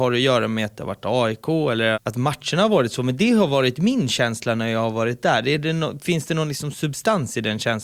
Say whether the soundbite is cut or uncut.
cut